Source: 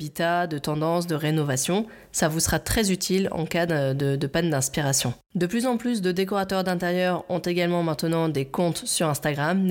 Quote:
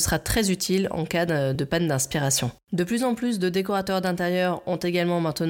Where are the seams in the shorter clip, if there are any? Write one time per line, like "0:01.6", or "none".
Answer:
0:01.5